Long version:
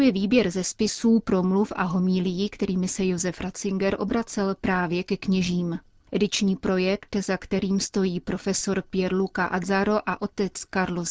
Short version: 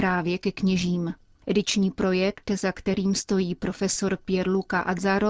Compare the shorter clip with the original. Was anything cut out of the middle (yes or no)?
no